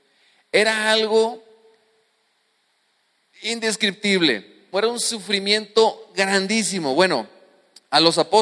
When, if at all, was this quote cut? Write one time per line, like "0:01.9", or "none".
0:04.7